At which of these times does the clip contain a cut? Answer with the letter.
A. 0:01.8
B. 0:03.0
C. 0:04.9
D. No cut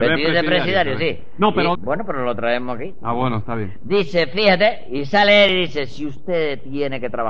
A